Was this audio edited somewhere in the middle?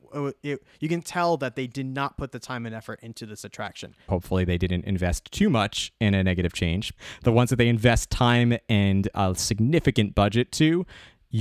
yes; 2 cuts; at 4.1 s, 7.0 s

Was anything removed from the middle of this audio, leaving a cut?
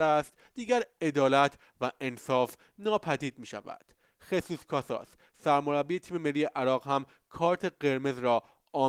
no; 0 cuts

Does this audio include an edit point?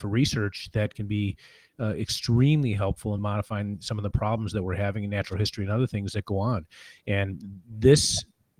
yes; 1 cut; at 3.2 s

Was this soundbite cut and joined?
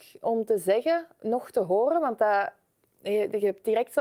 no; 0 cuts

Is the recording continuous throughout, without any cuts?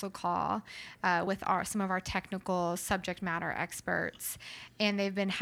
yes; 0 cuts

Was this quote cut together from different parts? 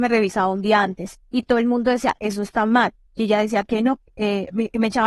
no; 0 cuts

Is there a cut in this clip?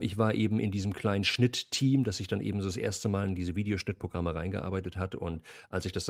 no; 0 cuts

